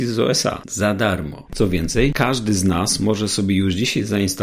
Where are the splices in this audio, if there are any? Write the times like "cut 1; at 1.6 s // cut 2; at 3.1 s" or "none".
cut 1; at 1.5 s

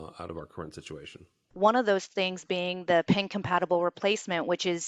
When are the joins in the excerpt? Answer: cut 1; at 1.5 s

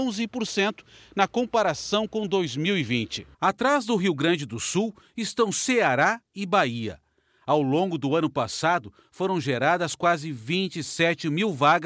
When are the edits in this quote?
cut 1; at 3.3 s

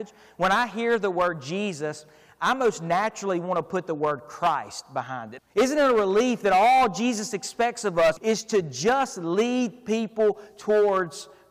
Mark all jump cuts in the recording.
cut 1; at 5.4 s // cut 2; at 8.2 s

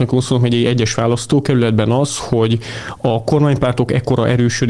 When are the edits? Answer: none

